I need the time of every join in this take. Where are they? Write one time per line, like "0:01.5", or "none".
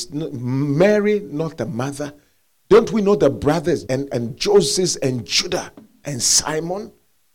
0:03.9